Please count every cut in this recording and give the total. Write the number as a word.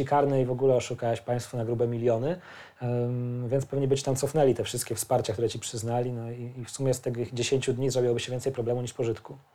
zero